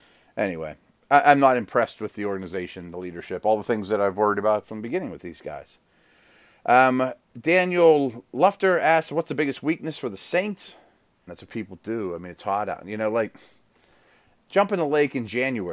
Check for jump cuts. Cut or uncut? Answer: cut